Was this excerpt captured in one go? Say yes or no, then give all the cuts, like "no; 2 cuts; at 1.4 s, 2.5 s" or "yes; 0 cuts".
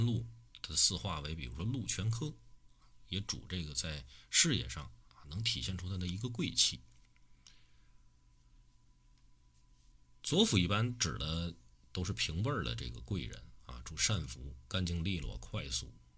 yes; 0 cuts